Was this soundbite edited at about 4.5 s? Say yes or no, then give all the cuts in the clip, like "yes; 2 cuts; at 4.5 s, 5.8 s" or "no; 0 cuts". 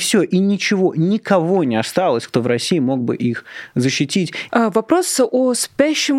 yes; 1 cut; at 4.5 s